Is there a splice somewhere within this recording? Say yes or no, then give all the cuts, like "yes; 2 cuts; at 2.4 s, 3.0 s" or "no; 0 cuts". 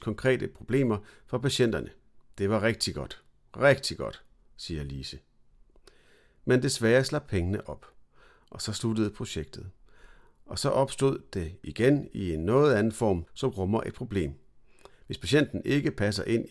yes; 1 cut; at 13.3 s